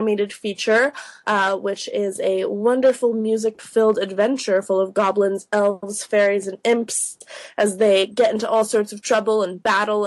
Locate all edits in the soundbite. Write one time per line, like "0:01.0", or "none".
0:01.2

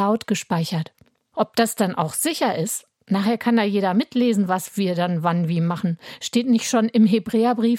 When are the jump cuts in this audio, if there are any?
0:01.3

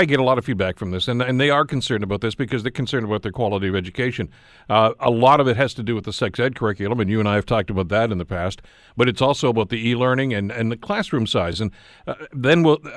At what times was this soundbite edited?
none

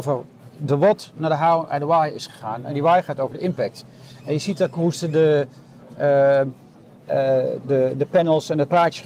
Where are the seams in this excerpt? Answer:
none

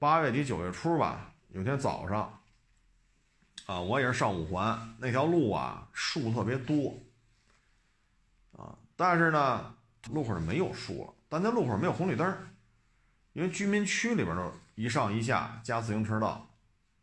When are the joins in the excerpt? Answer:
0:10.1

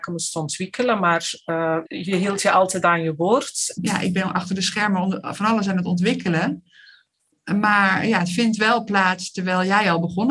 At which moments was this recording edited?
0:01.9
0:03.8

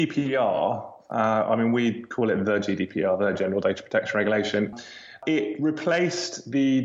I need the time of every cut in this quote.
none

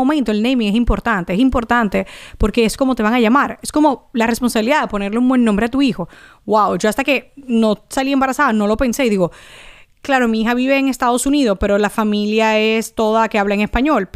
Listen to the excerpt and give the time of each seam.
none

